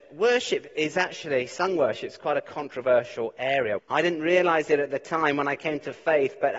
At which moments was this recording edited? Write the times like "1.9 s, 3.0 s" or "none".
3.8 s